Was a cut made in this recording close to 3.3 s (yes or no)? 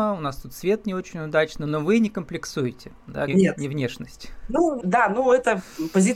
yes